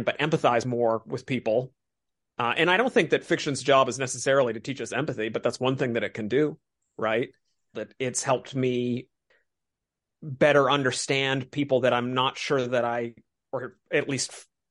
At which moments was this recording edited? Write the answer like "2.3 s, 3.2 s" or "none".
7.7 s